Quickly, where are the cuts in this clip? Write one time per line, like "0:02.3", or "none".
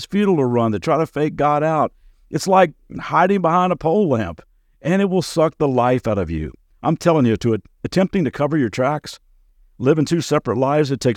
none